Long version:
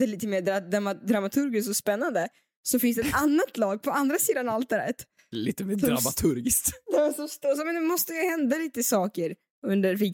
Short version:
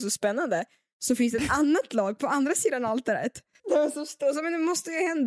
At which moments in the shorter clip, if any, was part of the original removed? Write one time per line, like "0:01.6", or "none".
0:03.6